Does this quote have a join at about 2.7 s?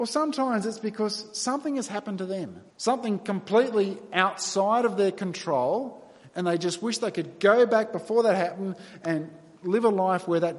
yes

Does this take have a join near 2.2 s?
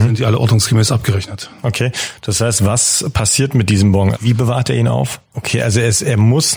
no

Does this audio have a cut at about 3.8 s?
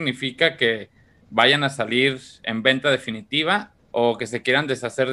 yes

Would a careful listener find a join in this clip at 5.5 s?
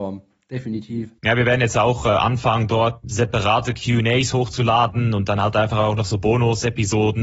no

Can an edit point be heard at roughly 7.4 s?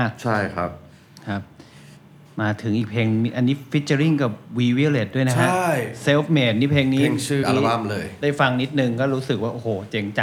yes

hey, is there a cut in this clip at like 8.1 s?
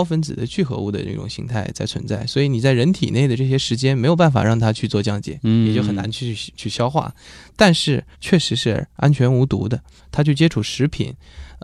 yes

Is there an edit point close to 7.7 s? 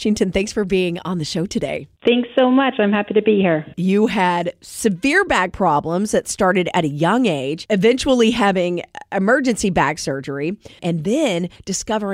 no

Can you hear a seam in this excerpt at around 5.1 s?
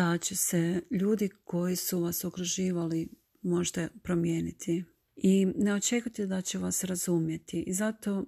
yes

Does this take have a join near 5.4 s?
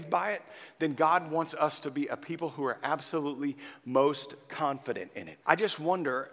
yes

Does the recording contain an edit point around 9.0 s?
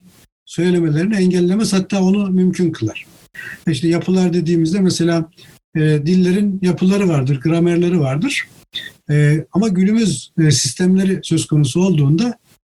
yes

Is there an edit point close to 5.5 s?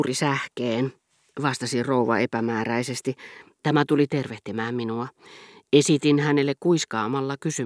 no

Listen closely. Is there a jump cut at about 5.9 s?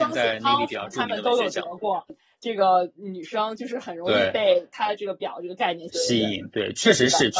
yes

